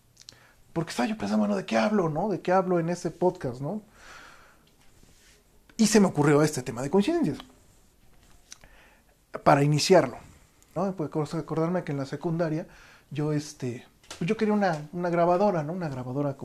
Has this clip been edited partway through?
yes; 1 cut; at 10.8 s

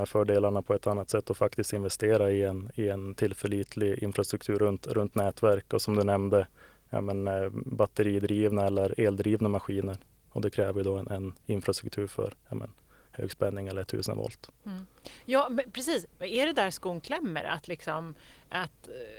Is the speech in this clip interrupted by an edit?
no; 0 cuts

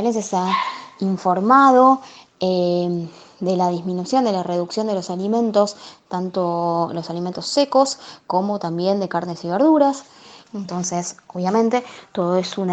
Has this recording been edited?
yes; 1 cut; at 10.5 s

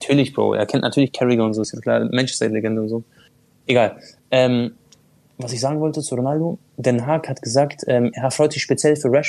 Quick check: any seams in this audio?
no; 0 cuts

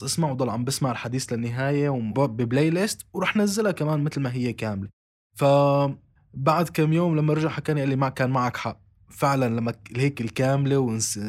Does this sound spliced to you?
yes; 1 cut; at 2.1 s

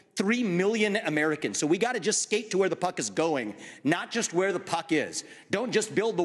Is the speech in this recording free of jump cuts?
yes; 0 cuts

